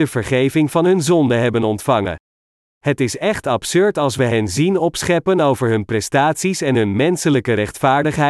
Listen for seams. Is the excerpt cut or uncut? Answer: cut